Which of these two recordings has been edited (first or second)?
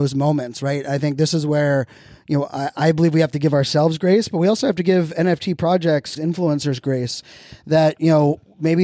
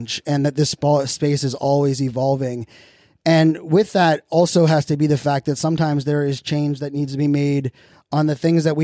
first